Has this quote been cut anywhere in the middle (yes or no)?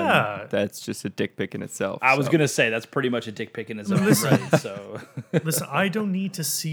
no